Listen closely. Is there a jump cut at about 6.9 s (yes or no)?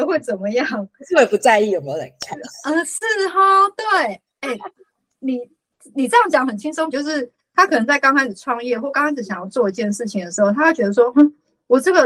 yes